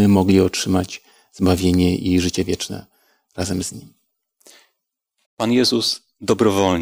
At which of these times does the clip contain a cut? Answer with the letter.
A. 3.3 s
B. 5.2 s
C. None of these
B